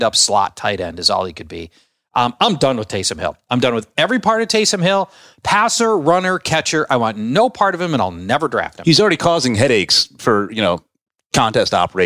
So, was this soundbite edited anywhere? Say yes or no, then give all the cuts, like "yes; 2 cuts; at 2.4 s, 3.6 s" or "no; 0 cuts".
no; 0 cuts